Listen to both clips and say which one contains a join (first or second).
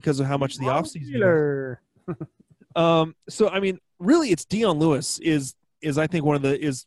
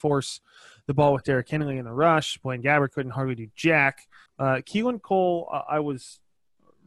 second